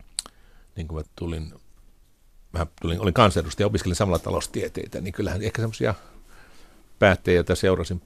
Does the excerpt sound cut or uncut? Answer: cut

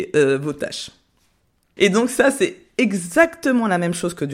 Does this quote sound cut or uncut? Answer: cut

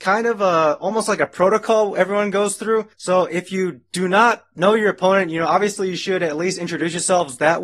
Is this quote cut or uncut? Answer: cut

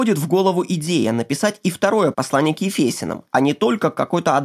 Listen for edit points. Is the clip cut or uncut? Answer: cut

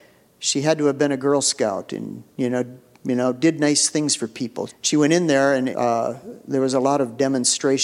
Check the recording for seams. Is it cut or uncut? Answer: cut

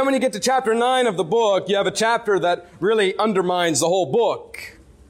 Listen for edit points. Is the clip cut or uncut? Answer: uncut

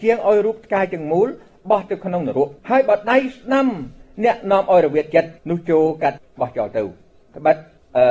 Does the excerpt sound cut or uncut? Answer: cut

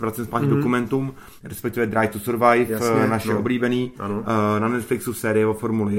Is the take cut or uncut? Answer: cut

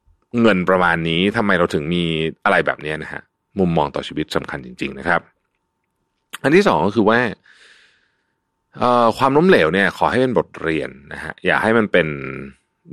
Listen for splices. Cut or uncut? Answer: uncut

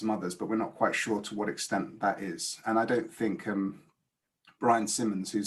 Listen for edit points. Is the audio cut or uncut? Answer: uncut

